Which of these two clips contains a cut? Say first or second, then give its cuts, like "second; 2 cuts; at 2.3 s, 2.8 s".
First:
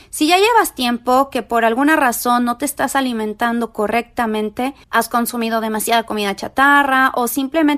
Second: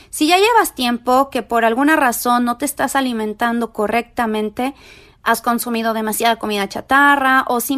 first; 1 cut; at 4.8 s